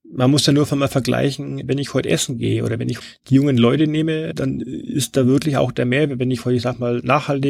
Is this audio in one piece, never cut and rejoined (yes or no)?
yes